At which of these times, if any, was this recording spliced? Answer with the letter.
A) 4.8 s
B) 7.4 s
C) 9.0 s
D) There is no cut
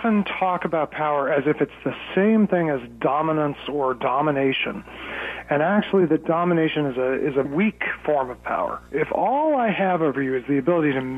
B